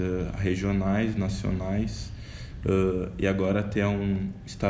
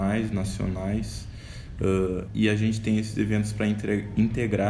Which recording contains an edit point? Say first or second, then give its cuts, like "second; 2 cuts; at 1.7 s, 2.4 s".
second; 1 cut; at 2.3 s